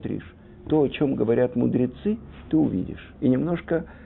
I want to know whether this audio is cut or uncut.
cut